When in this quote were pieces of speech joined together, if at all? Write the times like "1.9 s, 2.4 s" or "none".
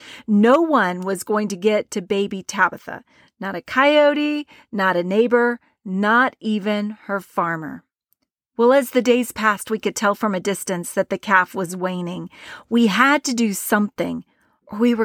none